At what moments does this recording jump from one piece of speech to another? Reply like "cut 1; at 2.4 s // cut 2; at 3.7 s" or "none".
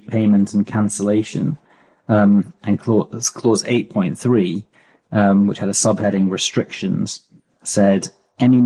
none